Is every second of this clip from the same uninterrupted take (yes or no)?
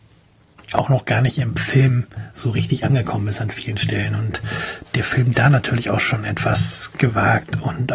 yes